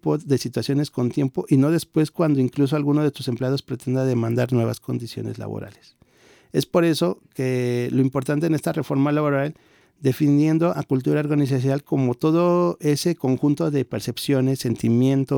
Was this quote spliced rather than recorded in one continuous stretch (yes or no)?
yes